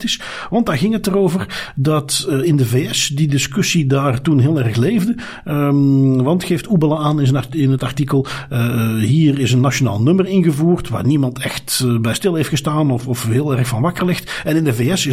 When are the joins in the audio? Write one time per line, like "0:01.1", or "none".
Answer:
none